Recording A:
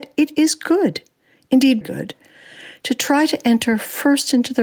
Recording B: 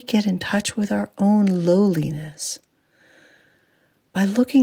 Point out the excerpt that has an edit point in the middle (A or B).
A